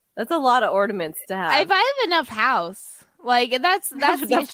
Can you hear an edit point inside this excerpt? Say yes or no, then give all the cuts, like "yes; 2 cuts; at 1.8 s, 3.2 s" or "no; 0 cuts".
no; 0 cuts